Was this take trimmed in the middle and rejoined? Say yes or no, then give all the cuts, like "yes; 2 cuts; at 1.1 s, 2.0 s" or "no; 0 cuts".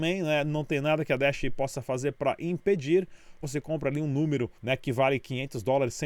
yes; 2 cuts; at 3.4 s, 4.6 s